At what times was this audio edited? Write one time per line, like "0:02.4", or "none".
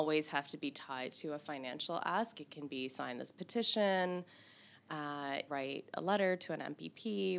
0:05.5